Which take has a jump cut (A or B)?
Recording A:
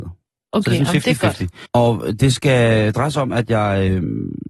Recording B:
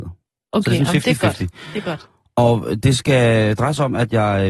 A